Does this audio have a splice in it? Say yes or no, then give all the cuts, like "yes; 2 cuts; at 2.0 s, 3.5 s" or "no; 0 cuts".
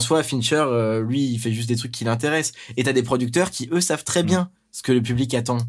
no; 0 cuts